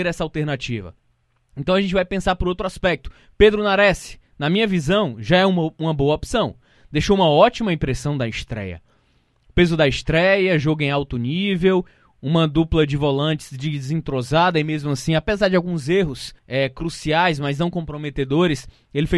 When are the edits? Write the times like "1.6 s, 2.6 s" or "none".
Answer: 16.4 s